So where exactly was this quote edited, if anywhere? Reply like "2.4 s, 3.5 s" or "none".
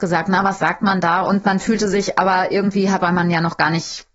1.2 s, 3.0 s